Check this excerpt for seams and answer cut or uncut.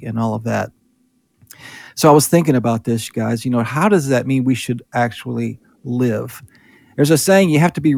uncut